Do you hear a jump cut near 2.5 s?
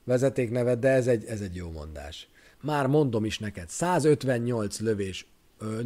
yes; 1 cut; at 2.5 s

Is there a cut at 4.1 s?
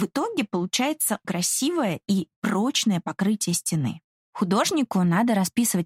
no; 1 cut; at 1.2 s

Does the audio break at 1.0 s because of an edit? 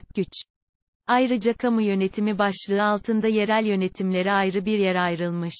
no; 0 cuts

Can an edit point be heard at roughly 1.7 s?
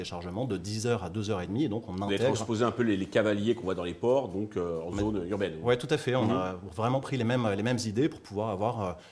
no; 0 cuts

